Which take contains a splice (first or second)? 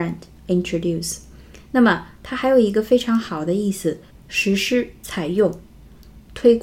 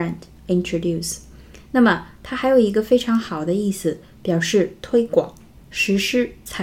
first